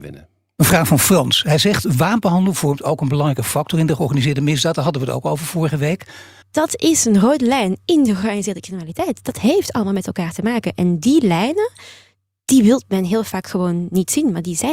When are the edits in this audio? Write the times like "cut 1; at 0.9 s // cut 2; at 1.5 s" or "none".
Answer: cut 1; at 6.4 s